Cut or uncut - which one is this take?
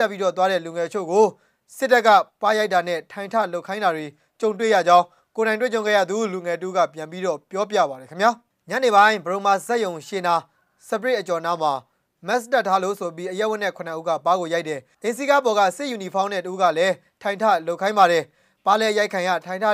uncut